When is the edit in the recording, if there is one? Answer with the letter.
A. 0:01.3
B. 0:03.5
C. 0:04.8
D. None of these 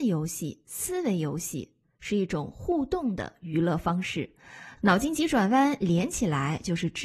C